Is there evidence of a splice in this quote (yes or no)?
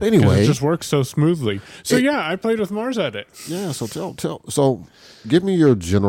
no